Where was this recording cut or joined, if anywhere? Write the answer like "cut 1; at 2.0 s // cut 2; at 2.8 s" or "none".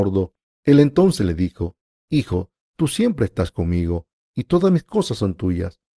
none